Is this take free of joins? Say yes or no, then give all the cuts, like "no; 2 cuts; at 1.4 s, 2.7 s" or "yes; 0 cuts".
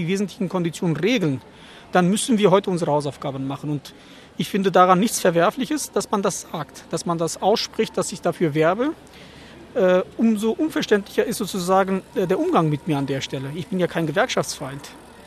yes; 0 cuts